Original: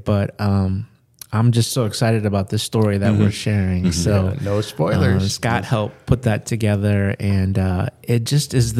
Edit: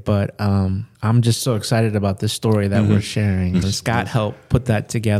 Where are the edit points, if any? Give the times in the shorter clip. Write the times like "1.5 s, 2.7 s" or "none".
0.9 s, 3.6 s